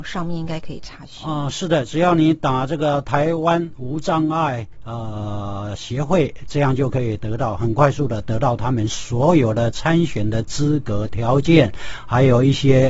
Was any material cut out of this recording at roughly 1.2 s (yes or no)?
no